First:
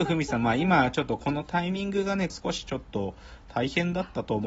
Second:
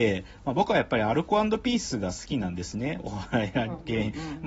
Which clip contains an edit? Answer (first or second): first